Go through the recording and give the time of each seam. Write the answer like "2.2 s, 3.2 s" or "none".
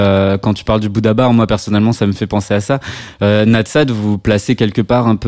none